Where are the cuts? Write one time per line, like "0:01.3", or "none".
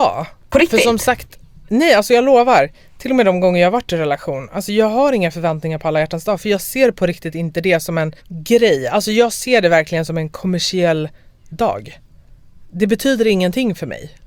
0:08.2